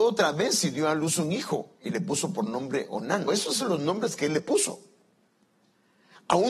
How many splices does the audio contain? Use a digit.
1